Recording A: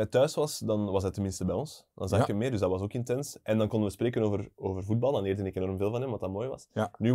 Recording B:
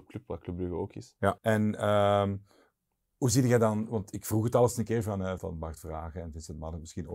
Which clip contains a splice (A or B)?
B